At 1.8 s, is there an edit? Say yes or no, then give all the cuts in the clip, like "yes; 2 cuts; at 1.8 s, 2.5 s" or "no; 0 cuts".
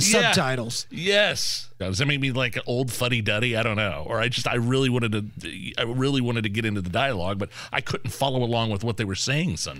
yes; 1 cut; at 1.8 s